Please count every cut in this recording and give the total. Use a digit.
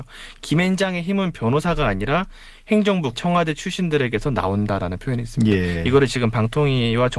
1